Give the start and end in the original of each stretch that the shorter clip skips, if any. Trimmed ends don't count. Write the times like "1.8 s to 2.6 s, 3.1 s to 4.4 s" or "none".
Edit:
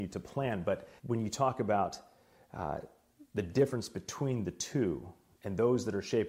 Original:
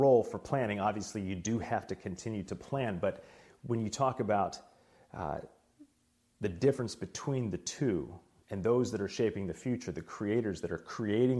3.3 s to 3.6 s, 5.9 s to 6.3 s